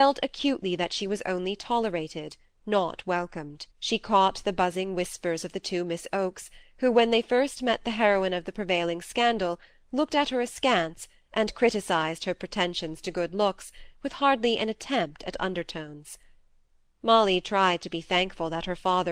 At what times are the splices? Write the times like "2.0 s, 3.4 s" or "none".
3.7 s